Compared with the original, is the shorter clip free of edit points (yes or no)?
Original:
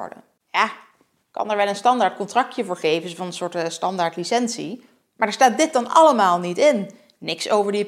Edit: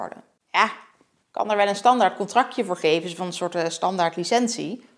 yes